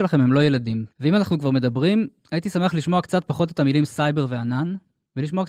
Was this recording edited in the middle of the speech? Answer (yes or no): yes